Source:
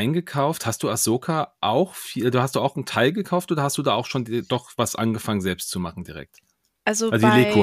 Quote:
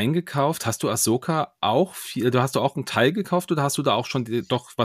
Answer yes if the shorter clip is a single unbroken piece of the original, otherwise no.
yes